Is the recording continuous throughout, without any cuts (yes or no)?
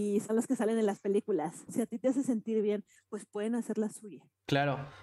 no